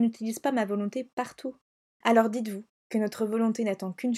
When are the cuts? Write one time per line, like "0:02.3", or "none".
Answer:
0:01.9